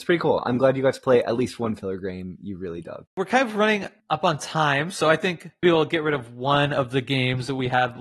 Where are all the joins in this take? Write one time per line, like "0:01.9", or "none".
0:05.6